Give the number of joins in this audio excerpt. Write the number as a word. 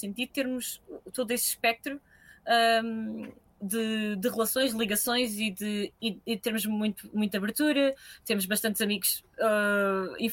zero